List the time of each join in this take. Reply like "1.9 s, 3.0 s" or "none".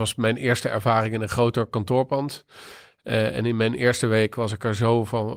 none